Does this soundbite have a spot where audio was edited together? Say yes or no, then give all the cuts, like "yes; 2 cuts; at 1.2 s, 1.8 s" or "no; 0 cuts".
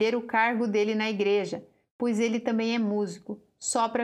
no; 0 cuts